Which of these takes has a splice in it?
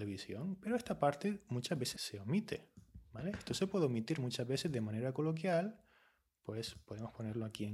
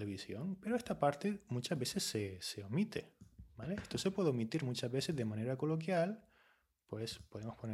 first; 1 cut; at 2.0 s

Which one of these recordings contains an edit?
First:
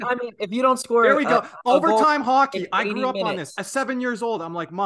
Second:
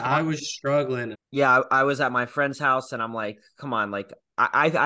second; 1 cut; at 1.1 s

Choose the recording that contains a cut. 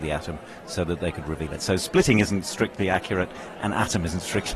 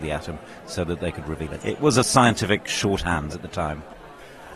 second; 2 cuts; at 1.6 s, 3.3 s

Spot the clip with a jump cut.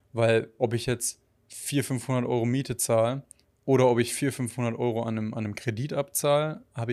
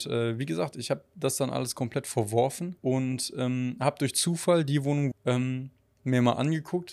second; 2 cuts; at 2.8 s, 5.1 s

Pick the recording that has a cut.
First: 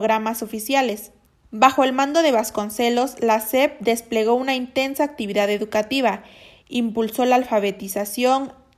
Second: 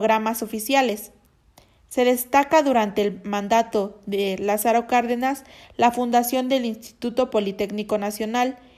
first; 1 cut; at 1.4 s

